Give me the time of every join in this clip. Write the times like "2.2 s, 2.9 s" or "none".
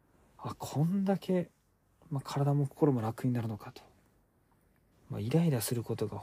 4.9 s